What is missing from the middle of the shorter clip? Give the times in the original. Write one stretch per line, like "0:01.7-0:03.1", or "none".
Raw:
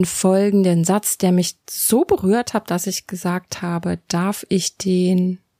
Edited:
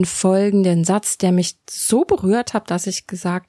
none